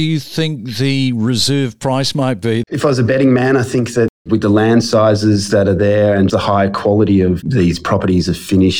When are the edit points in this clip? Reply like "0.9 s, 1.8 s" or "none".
2.6 s, 6.3 s